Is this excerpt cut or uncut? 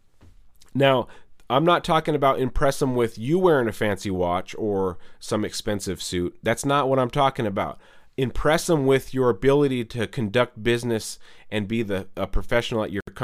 uncut